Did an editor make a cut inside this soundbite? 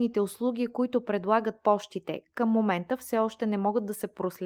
no; 0 cuts

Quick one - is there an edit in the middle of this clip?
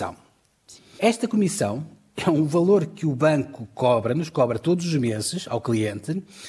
yes; 1 cut; at 1.0 s

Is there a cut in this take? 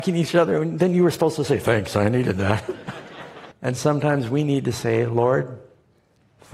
yes; 1 cut; at 3.5 s

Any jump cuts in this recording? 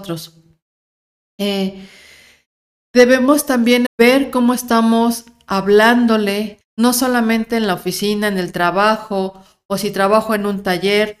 yes; 2 cuts; at 3.9 s, 6.6 s

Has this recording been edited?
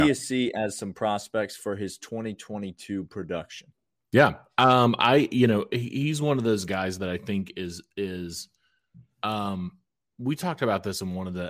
no; 0 cuts

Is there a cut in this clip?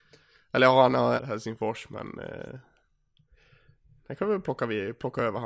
yes; 1 cut; at 1.2 s

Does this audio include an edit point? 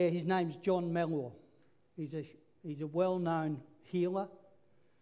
no; 0 cuts

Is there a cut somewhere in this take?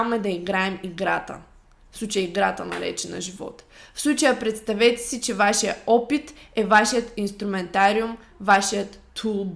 no; 0 cuts

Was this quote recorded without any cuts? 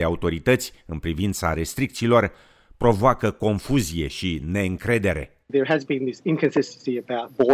yes; 0 cuts

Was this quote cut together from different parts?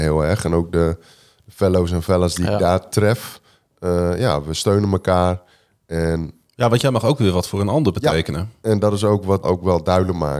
yes; 1 cut; at 9.4 s

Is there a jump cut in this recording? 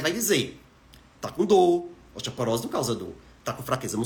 no; 0 cuts

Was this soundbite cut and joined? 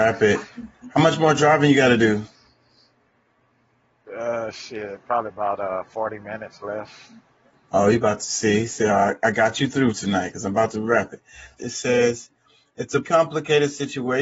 yes; 2 cuts; at 11.6 s, 13.0 s

